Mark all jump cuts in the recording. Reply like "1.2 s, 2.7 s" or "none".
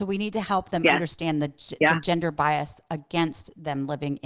none